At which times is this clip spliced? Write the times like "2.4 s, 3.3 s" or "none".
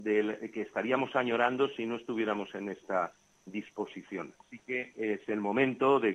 4.4 s